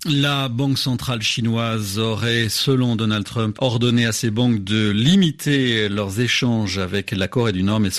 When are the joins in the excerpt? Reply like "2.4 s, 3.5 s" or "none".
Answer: 3.5 s